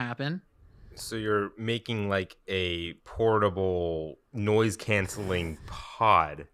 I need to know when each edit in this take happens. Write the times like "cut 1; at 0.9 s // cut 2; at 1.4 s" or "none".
cut 1; at 3.0 s // cut 2; at 4.2 s